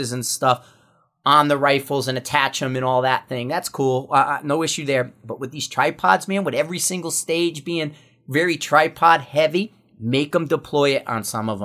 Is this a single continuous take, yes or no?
yes